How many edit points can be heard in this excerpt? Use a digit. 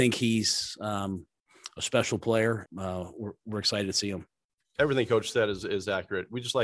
1